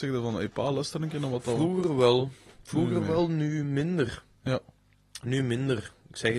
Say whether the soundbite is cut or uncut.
uncut